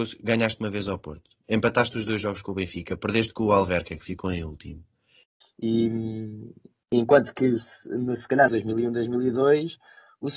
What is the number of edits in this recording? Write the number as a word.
two